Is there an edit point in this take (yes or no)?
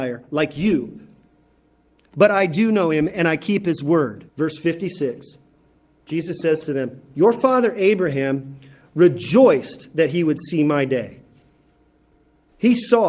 yes